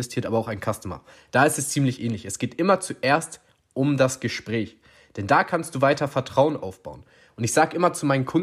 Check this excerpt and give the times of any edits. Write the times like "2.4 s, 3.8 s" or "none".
none